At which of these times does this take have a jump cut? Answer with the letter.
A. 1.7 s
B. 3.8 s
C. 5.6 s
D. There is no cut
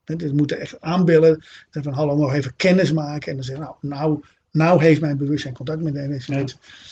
D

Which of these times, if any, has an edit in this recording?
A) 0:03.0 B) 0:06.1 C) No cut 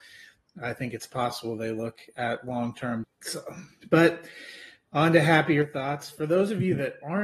A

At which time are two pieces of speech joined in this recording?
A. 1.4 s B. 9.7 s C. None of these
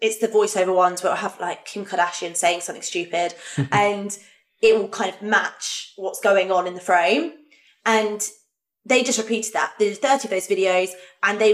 C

